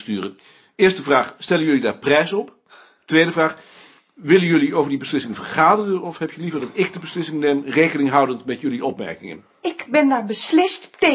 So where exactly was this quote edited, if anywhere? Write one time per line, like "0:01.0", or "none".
none